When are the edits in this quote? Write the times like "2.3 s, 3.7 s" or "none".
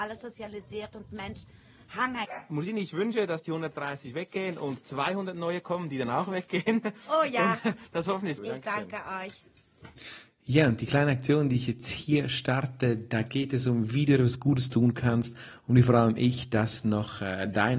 8.4 s